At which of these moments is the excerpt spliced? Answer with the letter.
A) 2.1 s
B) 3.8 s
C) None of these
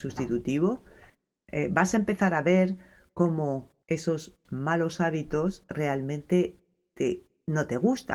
B